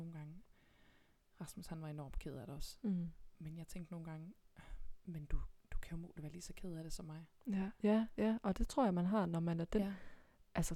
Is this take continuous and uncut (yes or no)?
yes